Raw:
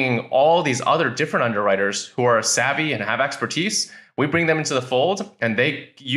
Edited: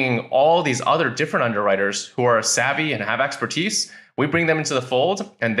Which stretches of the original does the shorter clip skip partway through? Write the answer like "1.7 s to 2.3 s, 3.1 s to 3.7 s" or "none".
none